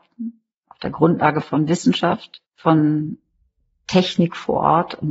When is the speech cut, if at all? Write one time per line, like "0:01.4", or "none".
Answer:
0:02.5